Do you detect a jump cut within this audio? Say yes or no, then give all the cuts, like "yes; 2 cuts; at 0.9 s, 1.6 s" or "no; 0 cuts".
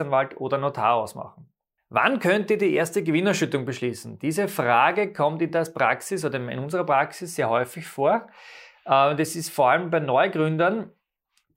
no; 0 cuts